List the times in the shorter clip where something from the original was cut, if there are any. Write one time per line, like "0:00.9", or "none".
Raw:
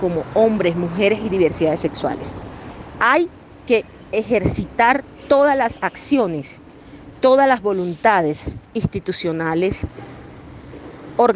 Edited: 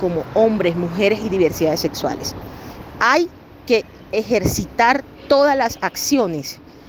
none